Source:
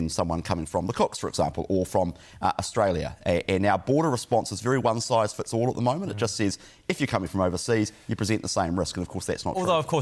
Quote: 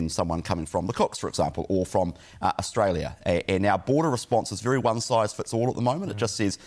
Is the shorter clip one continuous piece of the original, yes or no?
yes